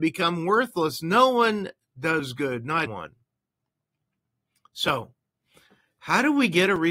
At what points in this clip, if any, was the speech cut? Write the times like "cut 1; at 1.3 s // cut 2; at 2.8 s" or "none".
cut 1; at 2.9 s